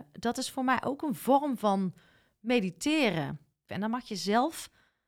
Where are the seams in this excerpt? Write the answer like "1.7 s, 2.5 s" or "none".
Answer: 3.7 s